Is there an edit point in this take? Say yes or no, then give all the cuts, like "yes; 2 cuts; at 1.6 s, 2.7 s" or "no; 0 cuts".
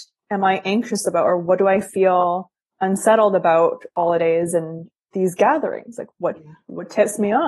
no; 0 cuts